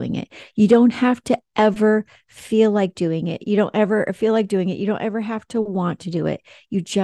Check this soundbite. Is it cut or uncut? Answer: uncut